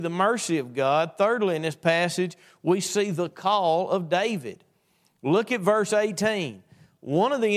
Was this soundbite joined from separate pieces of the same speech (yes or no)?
no